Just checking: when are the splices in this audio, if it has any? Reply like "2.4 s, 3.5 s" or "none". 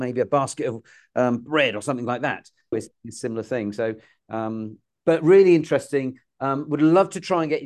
2.7 s